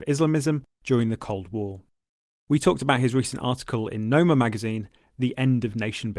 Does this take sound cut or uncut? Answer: uncut